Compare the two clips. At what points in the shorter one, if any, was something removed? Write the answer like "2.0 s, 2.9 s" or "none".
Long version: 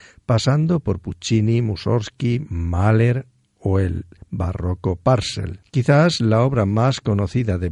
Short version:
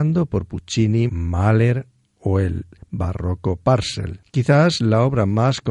1.1 s